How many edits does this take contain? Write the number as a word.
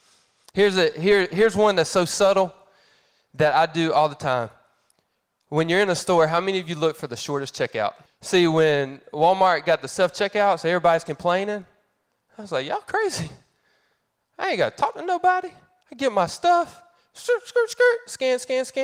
one